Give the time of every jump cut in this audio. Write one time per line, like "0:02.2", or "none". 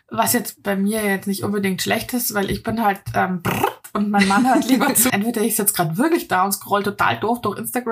0:05.1